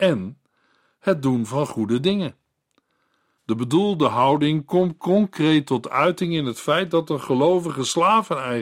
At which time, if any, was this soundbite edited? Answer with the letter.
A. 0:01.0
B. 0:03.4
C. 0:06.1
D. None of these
B